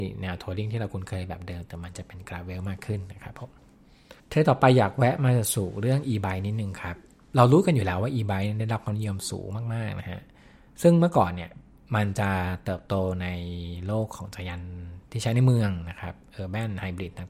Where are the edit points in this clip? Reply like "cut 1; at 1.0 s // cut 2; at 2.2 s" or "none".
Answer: cut 1; at 4.2 s